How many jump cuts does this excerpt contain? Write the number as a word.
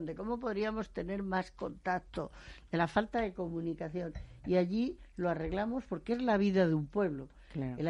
zero